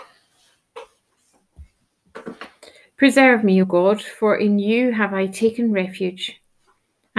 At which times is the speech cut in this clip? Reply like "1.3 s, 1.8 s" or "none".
none

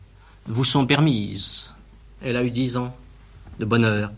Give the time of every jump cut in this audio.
2.0 s

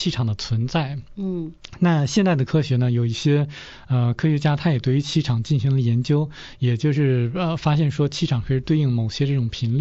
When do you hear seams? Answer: none

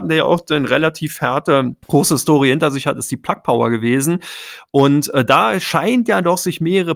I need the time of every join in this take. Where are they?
1.8 s

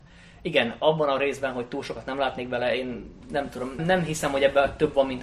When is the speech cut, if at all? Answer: 3.8 s

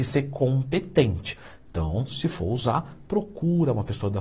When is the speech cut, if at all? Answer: none

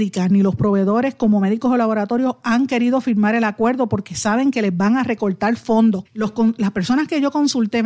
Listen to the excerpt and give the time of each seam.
6.1 s

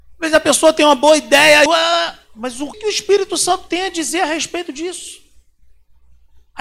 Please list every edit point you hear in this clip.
1.7 s, 2.7 s

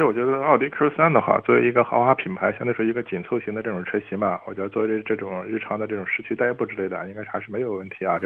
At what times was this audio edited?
none

